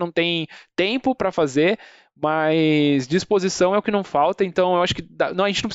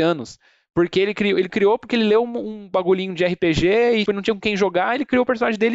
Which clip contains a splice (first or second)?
second